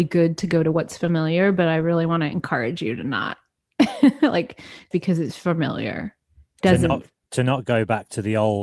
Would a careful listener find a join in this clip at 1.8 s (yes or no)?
no